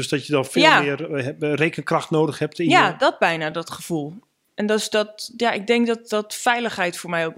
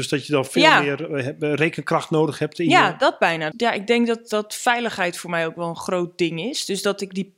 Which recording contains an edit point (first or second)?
second